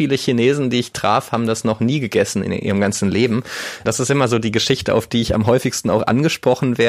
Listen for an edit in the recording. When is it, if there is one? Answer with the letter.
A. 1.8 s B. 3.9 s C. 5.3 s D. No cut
B